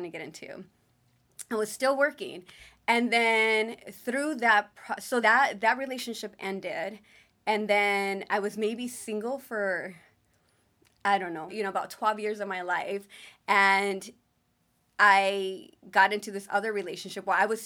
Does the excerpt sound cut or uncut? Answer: cut